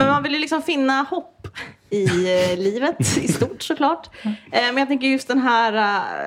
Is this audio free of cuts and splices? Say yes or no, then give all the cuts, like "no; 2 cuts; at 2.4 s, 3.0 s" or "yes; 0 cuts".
yes; 0 cuts